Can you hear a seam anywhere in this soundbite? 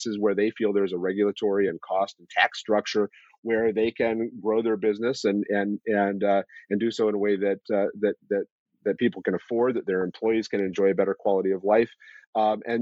no; 0 cuts

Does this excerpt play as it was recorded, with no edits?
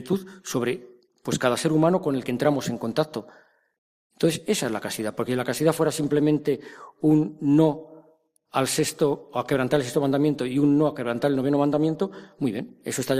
yes; 0 cuts

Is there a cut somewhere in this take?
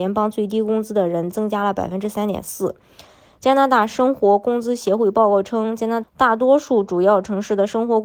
yes; 1 cut; at 6.0 s

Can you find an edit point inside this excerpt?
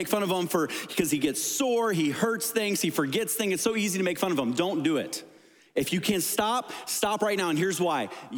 no; 0 cuts

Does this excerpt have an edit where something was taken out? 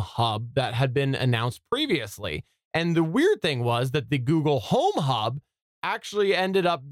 no; 0 cuts

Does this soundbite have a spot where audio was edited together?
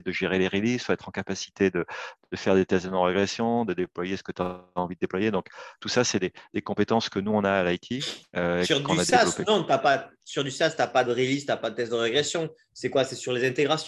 no; 0 cuts

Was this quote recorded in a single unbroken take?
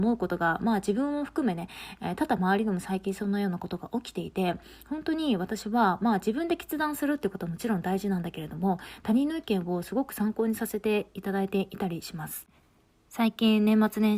yes; 0 cuts

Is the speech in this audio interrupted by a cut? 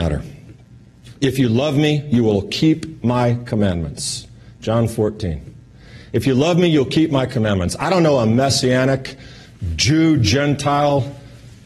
no; 0 cuts

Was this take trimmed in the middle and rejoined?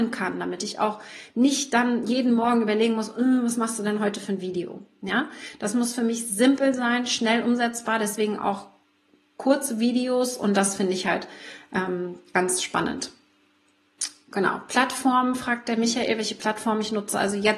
no; 0 cuts

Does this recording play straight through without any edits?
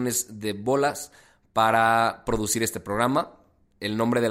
yes; 0 cuts

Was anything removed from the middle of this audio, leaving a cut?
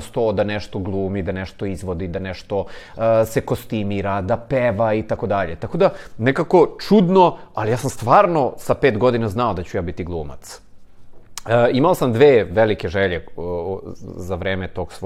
no; 0 cuts

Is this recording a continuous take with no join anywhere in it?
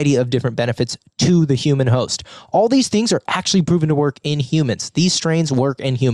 yes; 0 cuts

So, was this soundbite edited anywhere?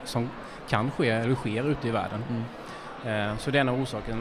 no; 0 cuts

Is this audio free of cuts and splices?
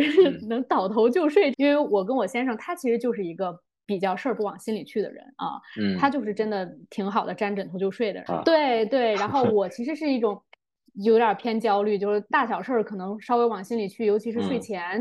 no; 2 cuts; at 1.5 s, 8.3 s

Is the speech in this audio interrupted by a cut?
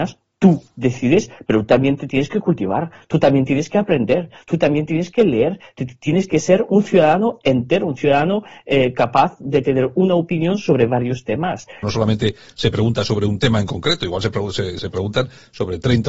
yes; 1 cut; at 11.8 s

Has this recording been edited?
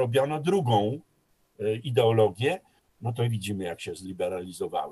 yes; 1 cut; at 2.8 s

